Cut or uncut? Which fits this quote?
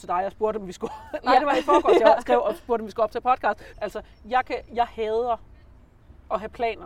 cut